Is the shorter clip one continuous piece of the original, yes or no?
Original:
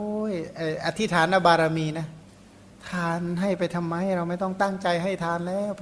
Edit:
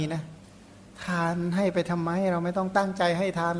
yes